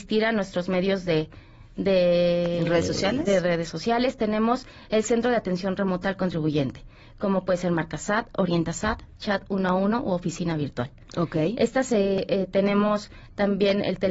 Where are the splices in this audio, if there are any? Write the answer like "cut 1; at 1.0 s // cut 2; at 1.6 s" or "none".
none